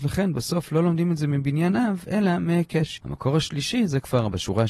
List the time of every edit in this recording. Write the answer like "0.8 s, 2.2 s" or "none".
3.0 s